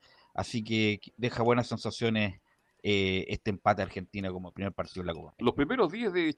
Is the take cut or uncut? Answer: uncut